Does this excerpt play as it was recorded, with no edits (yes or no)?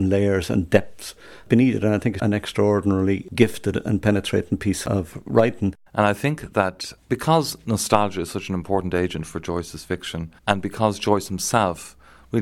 no